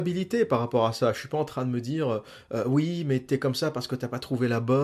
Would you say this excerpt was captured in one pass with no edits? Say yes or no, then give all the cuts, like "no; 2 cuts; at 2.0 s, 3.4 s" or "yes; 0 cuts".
yes; 0 cuts